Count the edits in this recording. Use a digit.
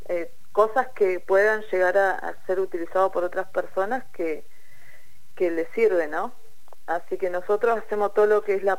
0